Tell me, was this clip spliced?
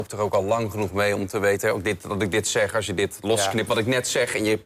no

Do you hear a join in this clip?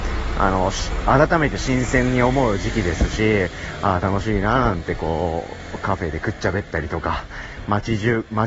no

